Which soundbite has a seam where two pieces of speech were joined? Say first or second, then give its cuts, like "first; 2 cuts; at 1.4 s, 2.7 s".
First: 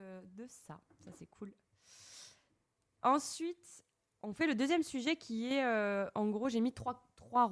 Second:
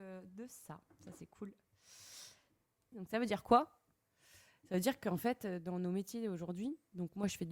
second; 1 cut; at 2.9 s